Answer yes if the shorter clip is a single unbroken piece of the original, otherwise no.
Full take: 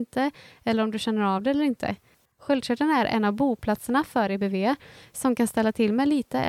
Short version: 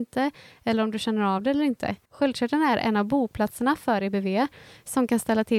no